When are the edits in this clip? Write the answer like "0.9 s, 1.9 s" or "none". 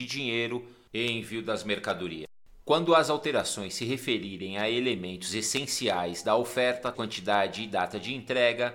2.6 s, 6.9 s